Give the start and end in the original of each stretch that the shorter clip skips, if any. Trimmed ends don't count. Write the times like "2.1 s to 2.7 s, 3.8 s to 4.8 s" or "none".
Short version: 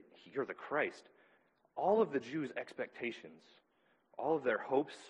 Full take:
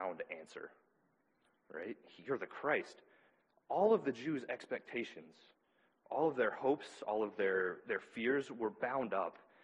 none